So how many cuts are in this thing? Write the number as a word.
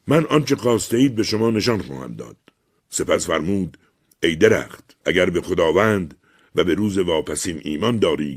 two